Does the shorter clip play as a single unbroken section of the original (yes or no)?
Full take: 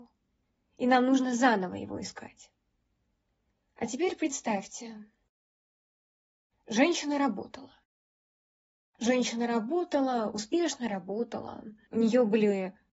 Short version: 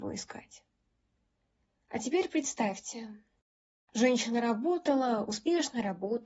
no